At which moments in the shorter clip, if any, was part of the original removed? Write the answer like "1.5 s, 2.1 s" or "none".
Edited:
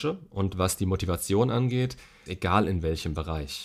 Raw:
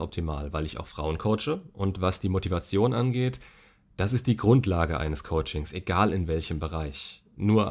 2.3 s